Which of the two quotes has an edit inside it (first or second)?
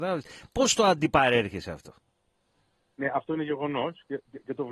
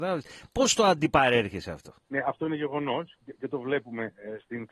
second